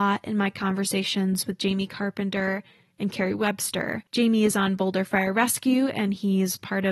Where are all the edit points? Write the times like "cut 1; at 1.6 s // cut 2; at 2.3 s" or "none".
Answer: cut 1; at 4.1 s